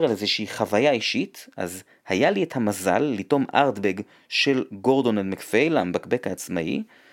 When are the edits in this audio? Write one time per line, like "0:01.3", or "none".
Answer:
none